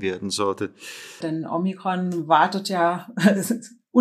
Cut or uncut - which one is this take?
cut